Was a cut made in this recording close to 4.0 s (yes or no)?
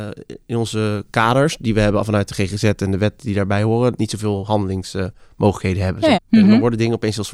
yes